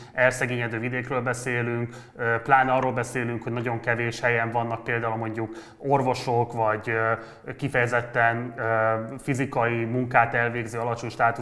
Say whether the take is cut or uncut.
uncut